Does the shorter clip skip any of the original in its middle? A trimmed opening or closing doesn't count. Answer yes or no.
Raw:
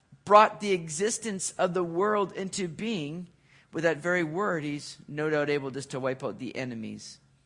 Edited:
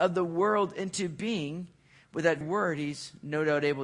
yes